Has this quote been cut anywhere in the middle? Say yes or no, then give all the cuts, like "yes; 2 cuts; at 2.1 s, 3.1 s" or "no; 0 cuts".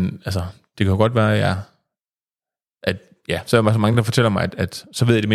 no; 0 cuts